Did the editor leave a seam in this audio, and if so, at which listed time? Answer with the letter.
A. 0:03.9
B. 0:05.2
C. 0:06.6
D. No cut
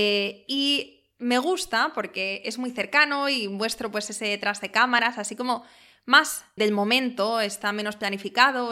C